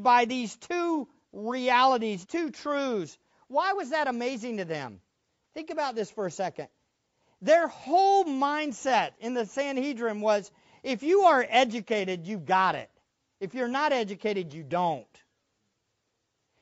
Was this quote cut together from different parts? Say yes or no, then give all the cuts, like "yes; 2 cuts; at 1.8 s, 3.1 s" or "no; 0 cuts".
yes; 1 cut; at 2.2 s